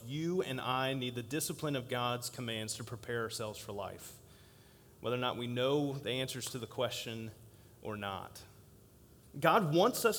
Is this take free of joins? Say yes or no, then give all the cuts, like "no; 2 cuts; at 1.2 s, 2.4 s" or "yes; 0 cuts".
no; 1 cut; at 9.2 s